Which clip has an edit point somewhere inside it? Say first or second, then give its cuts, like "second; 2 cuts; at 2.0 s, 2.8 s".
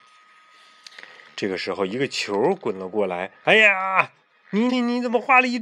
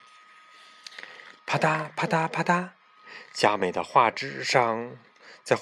first; 3 cuts; at 1.3 s, 3.4 s, 4.7 s